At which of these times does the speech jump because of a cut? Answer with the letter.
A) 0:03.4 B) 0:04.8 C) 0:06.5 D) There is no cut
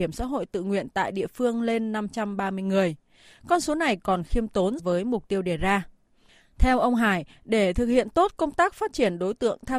B